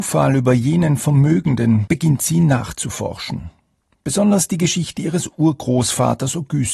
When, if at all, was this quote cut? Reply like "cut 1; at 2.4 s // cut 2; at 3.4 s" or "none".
cut 1; at 1.9 s

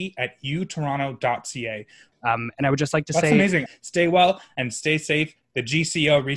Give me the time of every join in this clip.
cut 1; at 2.1 s // cut 2; at 3.7 s

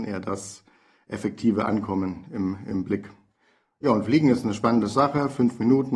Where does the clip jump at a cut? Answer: none

